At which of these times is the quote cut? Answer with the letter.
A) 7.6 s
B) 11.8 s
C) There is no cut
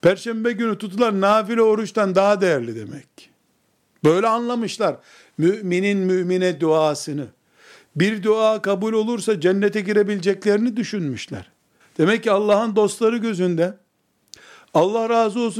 B